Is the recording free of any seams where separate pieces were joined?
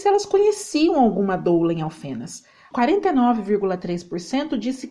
no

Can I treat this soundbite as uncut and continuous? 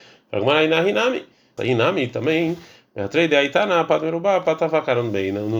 no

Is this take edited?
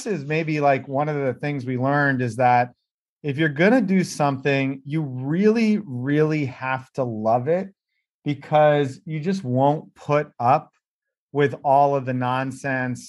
no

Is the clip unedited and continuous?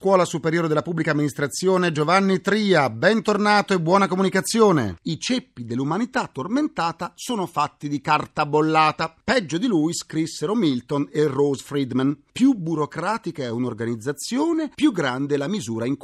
no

